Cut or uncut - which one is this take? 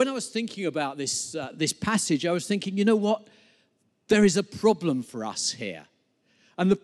uncut